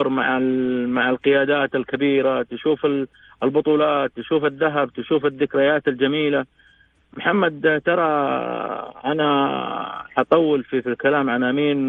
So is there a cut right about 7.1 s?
no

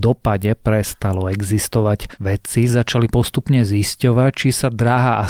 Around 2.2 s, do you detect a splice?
yes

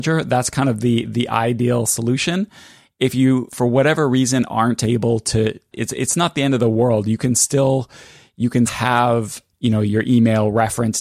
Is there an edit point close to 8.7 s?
yes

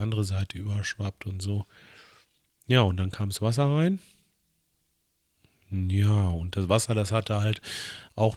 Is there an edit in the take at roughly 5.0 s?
no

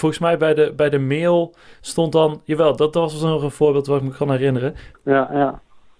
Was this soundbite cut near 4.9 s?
yes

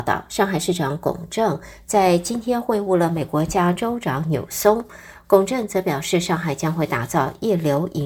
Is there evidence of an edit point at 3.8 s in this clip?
yes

